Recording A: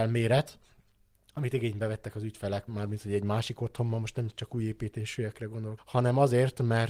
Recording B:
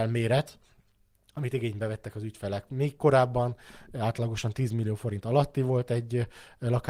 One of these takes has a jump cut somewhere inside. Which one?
A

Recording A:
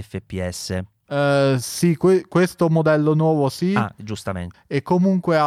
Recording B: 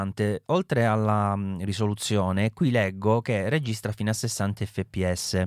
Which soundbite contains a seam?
A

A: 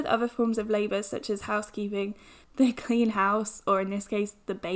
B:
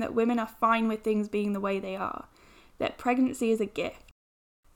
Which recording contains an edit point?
A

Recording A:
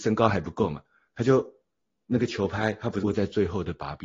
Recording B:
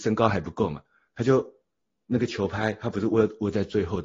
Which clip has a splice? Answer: A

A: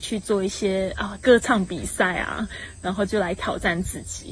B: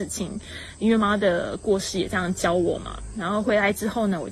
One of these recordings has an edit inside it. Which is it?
B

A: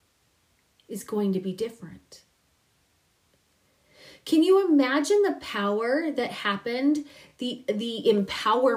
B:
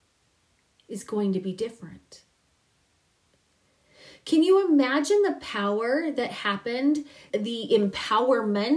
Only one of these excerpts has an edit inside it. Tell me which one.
B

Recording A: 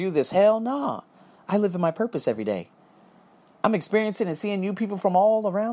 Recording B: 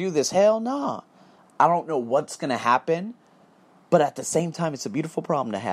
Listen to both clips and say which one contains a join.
B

